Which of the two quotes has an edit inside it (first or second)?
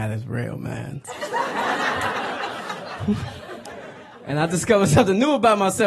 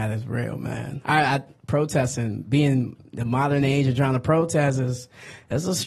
first